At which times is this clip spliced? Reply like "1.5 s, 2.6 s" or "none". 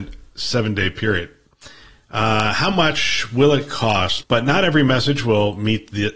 4.2 s